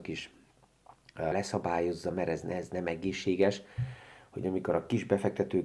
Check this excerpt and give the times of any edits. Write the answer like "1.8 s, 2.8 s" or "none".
1.3 s